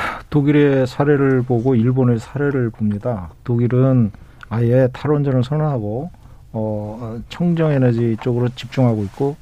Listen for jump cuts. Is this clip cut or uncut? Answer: cut